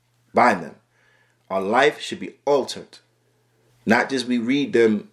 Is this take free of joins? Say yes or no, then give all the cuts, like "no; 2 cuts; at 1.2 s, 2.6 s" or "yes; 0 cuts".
no; 1 cut; at 3.7 s